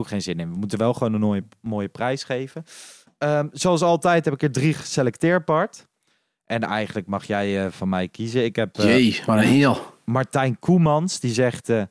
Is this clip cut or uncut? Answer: uncut